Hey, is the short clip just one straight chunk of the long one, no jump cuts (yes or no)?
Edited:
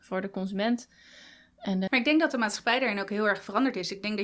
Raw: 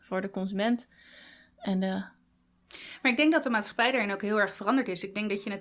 no